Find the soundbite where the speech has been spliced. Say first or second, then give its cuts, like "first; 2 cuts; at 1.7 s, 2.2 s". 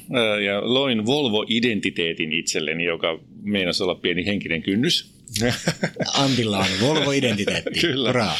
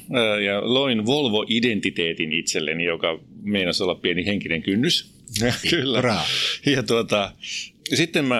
second; 1 cut; at 5.6 s